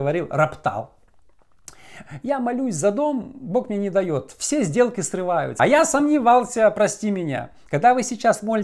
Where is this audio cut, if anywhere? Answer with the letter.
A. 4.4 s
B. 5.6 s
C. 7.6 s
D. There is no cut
B